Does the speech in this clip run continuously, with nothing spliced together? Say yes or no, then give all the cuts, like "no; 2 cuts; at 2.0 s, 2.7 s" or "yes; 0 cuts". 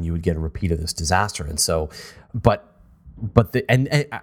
no; 1 cut; at 2.3 s